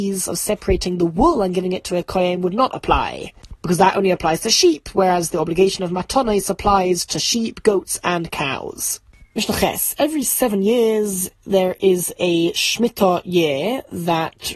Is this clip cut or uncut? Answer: uncut